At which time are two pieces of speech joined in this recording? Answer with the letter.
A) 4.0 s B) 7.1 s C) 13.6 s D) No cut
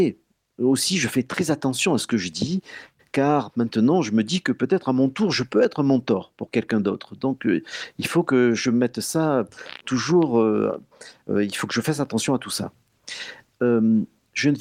D